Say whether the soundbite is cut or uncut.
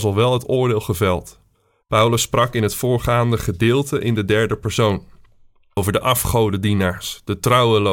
cut